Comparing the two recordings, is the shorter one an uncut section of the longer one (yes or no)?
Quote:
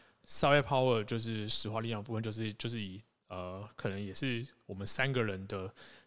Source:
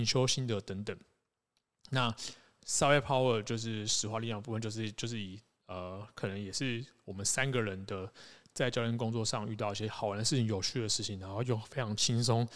yes